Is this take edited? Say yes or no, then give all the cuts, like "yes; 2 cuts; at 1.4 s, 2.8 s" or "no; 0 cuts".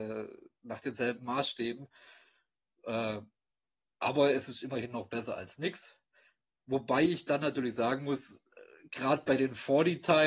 no; 0 cuts